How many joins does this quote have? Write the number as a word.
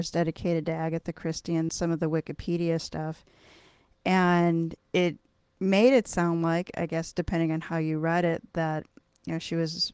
one